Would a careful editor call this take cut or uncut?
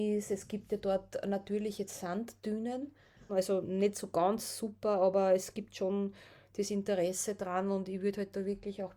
cut